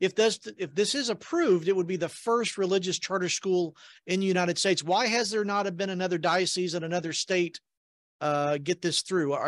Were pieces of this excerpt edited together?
no; 0 cuts

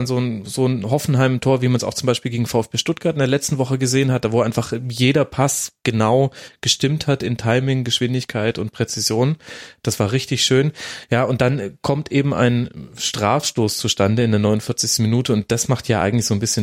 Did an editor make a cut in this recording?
no; 0 cuts

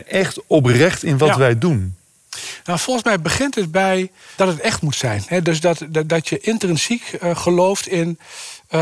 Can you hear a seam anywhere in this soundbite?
yes; 1 cut; at 4.4 s

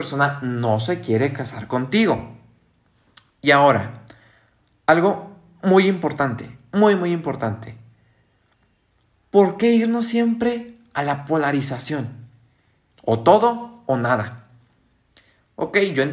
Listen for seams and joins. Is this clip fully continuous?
yes; 0 cuts

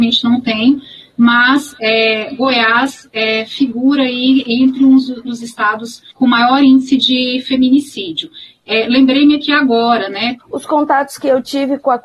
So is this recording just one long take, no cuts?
no; 2 cuts; at 5.2 s, 10.4 s

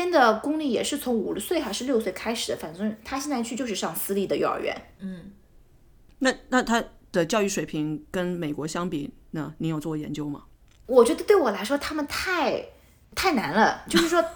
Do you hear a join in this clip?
no; 0 cuts

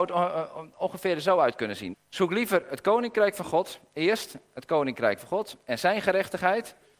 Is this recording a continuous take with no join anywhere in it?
no; 1 cut; at 1.9 s

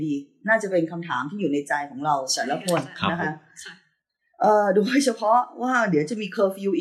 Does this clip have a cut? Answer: no; 0 cuts

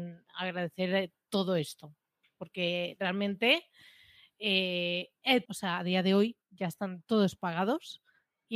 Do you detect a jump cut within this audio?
yes; 1 cut; at 5.5 s

